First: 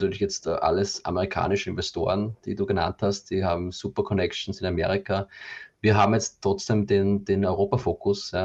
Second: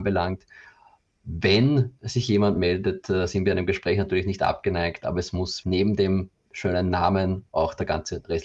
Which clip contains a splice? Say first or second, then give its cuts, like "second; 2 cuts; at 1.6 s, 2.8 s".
second; 1 cut; at 5.6 s